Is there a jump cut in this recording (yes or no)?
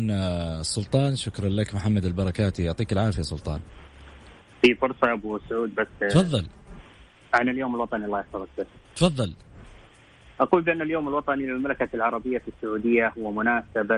no